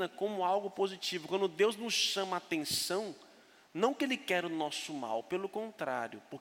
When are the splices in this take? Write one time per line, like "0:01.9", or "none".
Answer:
none